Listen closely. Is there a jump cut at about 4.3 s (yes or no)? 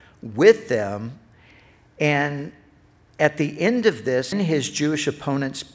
yes